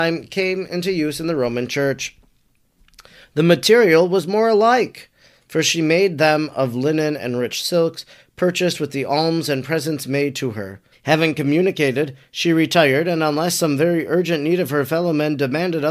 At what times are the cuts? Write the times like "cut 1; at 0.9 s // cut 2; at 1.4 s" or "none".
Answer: cut 1; at 10.9 s